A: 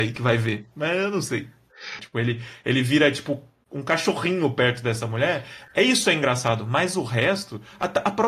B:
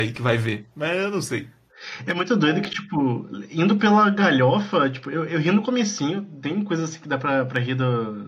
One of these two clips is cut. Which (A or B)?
A